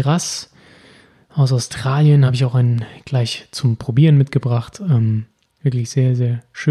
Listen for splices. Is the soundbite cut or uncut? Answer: uncut